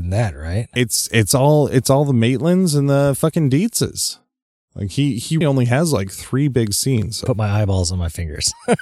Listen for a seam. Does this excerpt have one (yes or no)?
yes